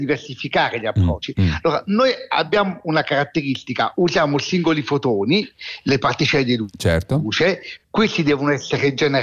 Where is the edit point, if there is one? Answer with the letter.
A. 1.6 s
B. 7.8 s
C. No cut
C